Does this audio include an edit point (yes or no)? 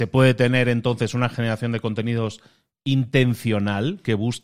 no